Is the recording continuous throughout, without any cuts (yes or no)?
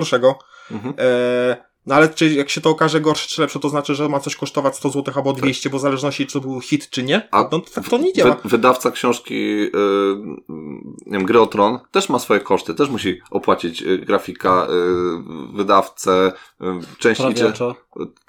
no